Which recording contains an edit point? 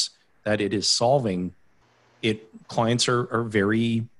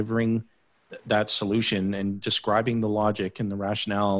first; 1 cut; at 2.6 s

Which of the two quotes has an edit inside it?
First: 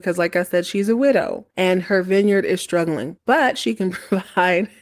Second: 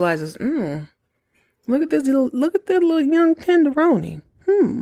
first; 2 cuts; at 1.5 s, 3.2 s

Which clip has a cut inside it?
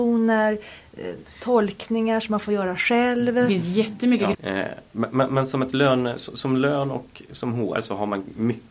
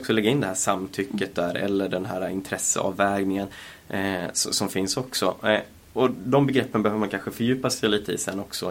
first; 1 cut; at 4.3 s

